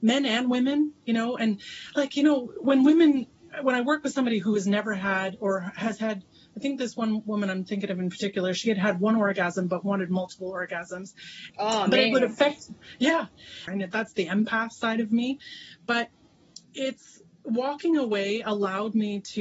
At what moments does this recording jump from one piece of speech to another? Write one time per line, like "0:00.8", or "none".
0:11.5
0:13.7
0:16.6

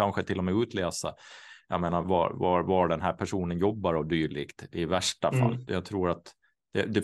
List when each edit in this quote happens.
0:05.7

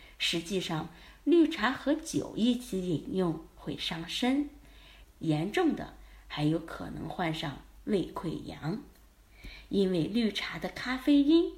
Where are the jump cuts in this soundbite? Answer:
0:05.0

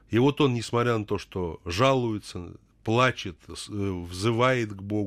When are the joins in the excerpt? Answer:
none

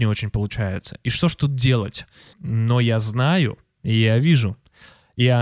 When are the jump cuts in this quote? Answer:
0:02.3

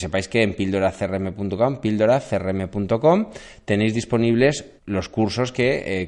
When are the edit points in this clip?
0:04.8

